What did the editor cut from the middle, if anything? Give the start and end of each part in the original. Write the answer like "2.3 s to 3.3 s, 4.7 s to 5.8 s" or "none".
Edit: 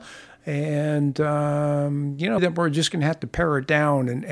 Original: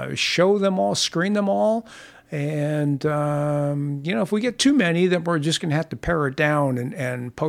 4.2 s to 5.1 s